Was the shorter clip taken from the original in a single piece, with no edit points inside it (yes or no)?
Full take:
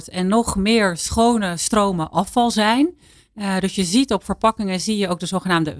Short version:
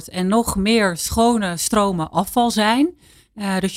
yes